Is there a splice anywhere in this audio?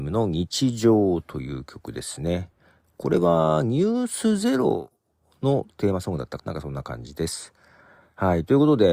yes; 1 cut; at 6.4 s

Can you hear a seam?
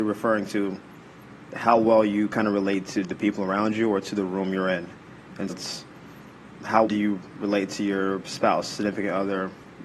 yes; 2 cuts; at 5.5 s, 6.9 s

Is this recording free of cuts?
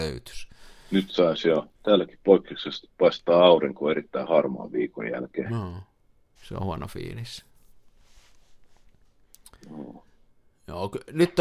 no; 2 cuts; at 1.7 s, 6.4 s

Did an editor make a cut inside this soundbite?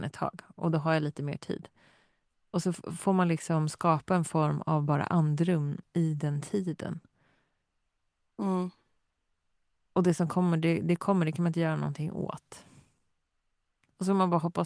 no; 0 cuts

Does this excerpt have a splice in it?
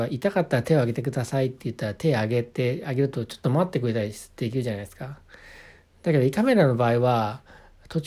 no; 0 cuts

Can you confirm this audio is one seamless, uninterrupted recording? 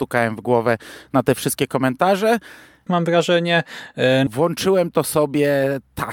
no; 2 cuts; at 2.9 s, 4.3 s

